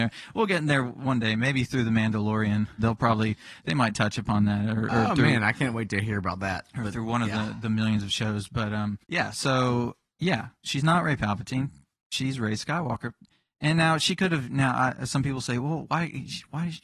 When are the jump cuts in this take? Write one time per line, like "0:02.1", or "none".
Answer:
0:02.8
0:09.0